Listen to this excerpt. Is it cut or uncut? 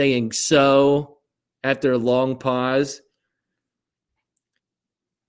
uncut